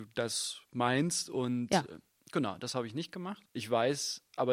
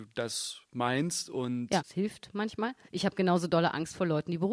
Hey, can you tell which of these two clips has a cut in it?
second; 1 cut; at 1.8 s

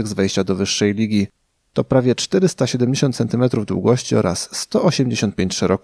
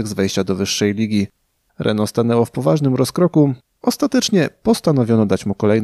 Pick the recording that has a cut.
second; 1 cut; at 1.7 s

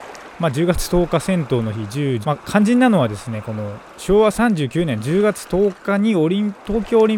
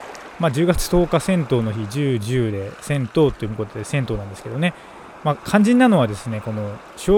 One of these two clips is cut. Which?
first; 1 cut; at 2.2 s

